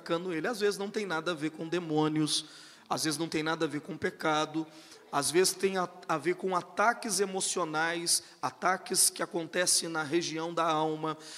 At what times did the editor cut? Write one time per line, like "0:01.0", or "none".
none

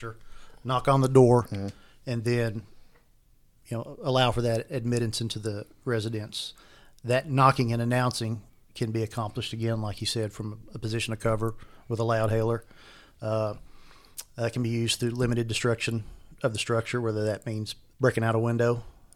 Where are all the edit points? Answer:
0:17.9

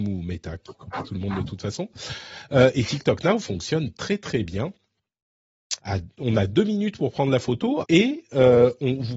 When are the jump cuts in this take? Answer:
0:05.8
0:07.8

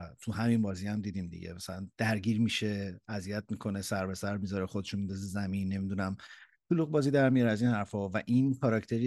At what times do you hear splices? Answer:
0:01.9

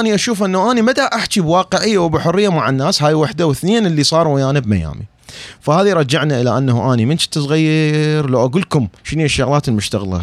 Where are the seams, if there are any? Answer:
0:09.0

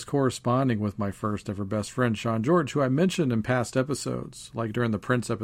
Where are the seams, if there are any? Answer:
none

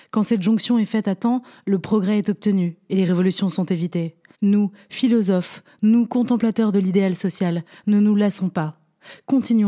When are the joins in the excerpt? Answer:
0:04.3

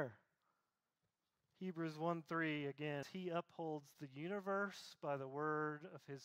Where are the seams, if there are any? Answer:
0:03.0

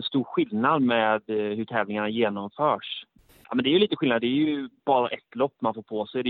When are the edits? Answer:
0:03.3
0:04.8

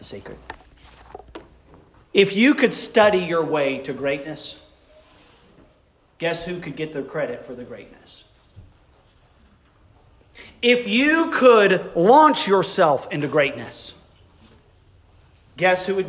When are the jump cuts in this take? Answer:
0:02.0

